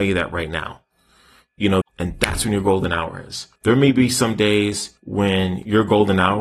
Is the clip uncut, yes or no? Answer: no